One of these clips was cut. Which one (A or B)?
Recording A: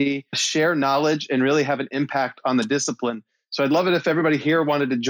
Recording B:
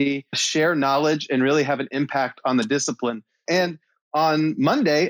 B